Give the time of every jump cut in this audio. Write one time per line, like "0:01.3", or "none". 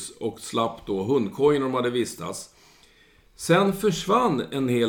none